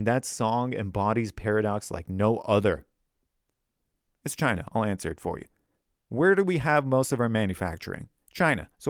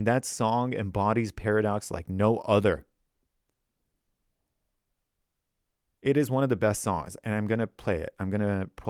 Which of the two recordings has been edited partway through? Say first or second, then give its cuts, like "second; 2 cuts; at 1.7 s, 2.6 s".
first; 1 cut; at 4.1 s